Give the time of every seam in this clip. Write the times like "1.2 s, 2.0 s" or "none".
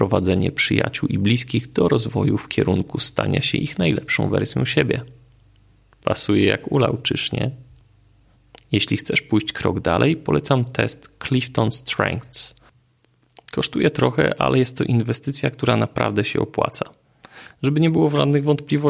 none